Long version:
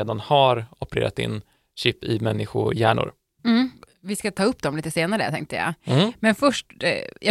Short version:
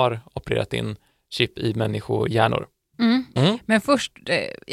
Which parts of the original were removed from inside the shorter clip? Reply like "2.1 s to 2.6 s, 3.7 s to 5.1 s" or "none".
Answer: 3.8 s to 5.9 s